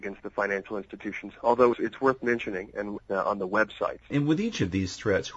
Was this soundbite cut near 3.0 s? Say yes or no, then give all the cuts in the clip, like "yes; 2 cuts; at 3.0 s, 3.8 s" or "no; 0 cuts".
yes; 3 cuts; at 1.7 s, 3.0 s, 4.1 s